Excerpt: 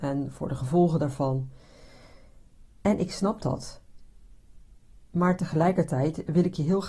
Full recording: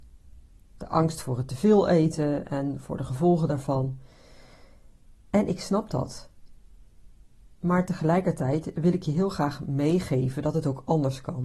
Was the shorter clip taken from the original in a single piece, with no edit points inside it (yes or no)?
yes